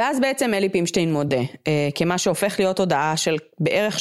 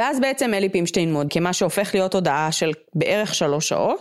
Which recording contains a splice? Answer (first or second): second